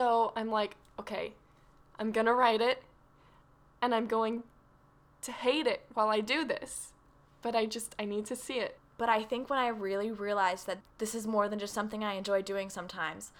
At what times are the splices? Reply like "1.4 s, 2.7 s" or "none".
8.8 s